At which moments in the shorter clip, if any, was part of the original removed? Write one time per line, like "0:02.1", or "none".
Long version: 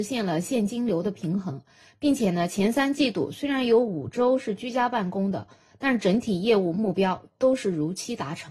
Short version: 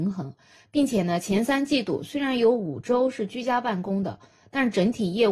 none